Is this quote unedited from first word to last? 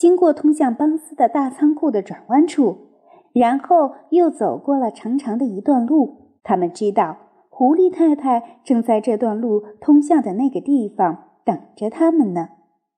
no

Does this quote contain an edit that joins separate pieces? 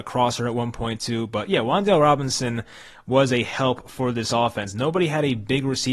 no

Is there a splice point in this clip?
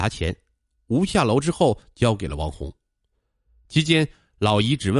no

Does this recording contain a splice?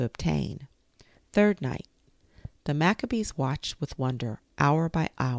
yes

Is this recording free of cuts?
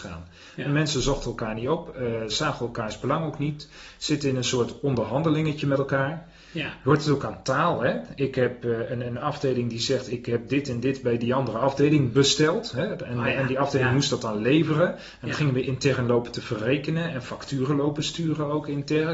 yes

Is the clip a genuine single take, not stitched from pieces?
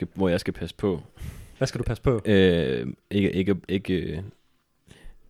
no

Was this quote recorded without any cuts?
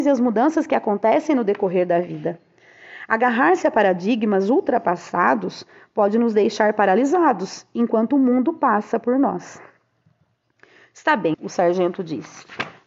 no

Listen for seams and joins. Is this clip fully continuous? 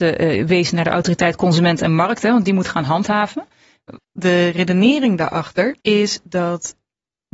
no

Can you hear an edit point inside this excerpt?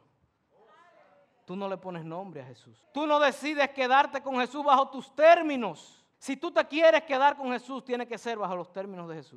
yes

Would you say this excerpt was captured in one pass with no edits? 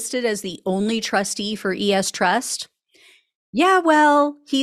yes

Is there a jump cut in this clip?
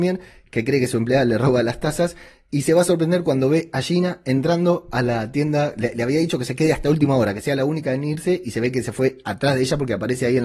no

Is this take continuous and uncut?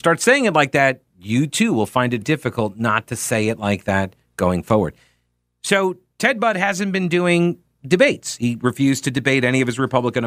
no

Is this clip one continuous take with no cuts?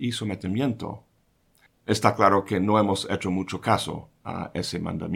no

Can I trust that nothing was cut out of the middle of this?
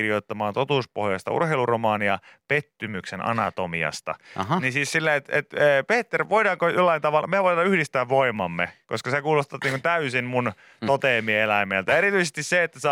yes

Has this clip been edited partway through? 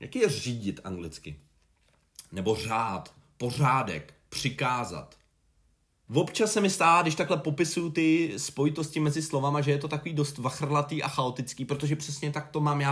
yes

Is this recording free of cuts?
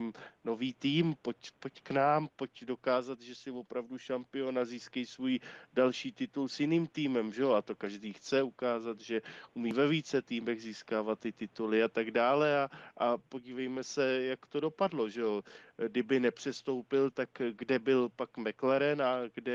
yes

